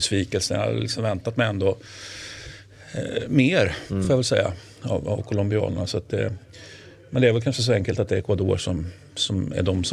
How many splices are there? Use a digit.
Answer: 0